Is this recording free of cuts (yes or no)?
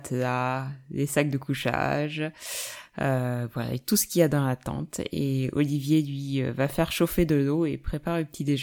yes